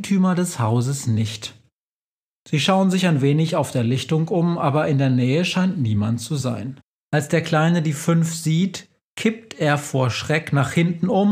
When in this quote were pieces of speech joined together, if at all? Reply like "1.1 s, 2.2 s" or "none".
7.1 s